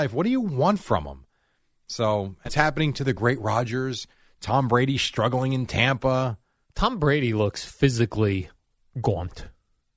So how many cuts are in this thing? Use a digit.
2